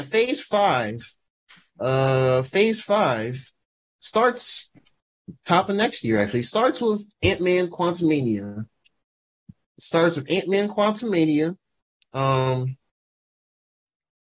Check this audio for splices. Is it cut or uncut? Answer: uncut